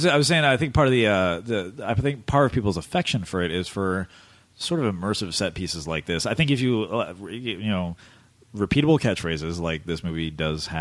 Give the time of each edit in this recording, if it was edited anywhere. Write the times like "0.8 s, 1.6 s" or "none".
none